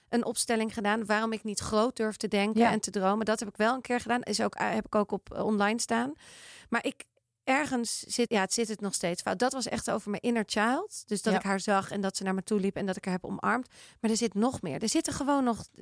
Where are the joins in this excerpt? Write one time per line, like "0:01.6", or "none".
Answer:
0:08.3